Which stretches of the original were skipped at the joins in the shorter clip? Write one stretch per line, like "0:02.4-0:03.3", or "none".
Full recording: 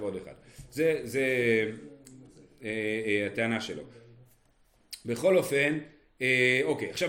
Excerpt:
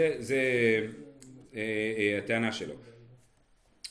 0:02.3-0:02.5